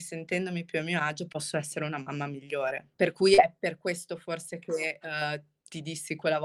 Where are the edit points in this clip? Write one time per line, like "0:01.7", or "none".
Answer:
0:02.9